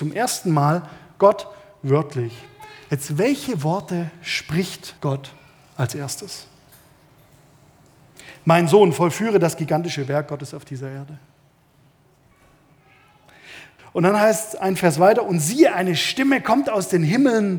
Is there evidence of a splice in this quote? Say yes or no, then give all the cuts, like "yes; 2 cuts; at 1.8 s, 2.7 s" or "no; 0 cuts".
yes; 2 cuts; at 5.0 s, 13.8 s